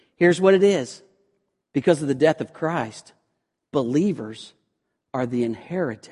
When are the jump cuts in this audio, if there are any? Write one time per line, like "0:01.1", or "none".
0:01.6